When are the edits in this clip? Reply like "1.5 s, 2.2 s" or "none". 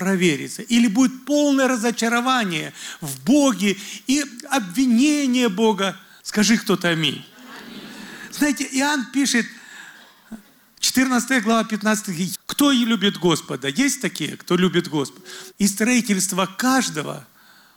6.2 s, 12.3 s, 15.5 s